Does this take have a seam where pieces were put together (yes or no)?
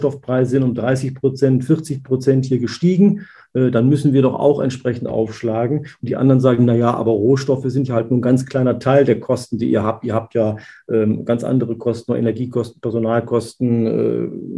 no